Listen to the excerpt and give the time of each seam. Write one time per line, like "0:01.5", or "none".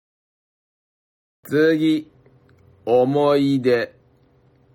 none